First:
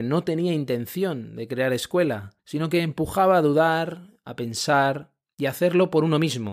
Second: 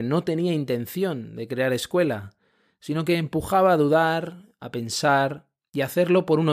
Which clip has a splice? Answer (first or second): first